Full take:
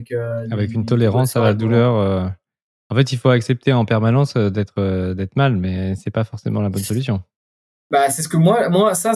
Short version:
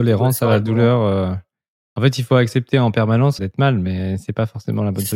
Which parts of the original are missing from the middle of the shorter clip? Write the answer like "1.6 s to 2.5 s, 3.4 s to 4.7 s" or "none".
4.3 s to 5.2 s